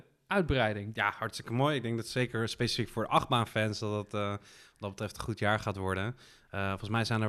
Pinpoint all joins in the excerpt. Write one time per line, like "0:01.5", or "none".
none